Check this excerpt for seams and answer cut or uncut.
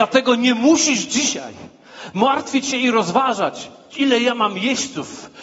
uncut